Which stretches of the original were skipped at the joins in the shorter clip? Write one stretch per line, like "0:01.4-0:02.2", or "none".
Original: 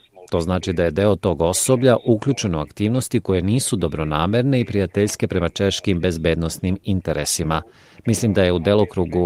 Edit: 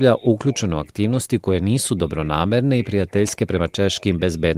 none